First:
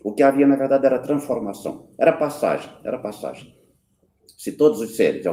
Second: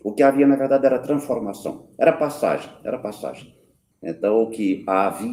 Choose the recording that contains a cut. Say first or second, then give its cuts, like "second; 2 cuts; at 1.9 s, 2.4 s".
second; 1 cut; at 3.9 s